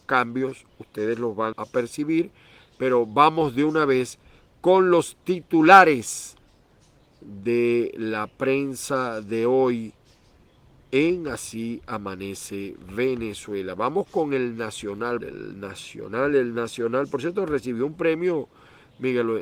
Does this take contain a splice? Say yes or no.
yes